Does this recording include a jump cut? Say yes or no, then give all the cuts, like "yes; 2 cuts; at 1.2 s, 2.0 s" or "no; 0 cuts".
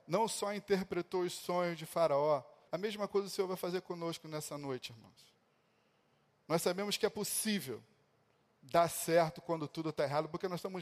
yes; 1 cut; at 2.7 s